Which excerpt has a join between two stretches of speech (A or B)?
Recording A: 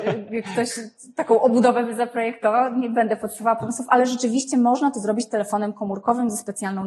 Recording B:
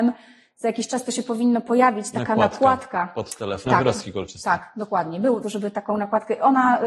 B